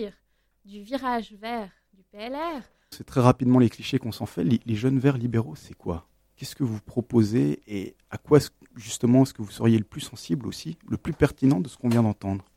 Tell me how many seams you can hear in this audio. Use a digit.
1